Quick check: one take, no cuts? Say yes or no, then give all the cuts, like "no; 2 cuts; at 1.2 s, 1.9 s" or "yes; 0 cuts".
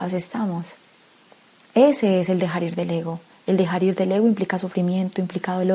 yes; 0 cuts